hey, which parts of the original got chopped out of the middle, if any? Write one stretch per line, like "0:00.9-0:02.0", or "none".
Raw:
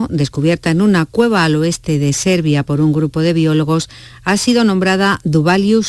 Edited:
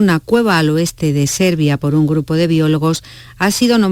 none